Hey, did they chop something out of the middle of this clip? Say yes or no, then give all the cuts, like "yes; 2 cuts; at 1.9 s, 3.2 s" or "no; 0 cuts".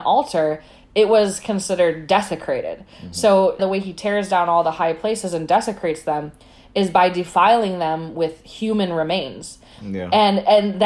yes; 1 cut; at 3.6 s